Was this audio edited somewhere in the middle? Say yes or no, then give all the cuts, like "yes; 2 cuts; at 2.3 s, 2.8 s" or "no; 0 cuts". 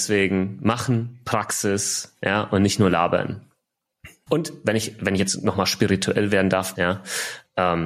yes; 2 cuts; at 4.3 s, 6.7 s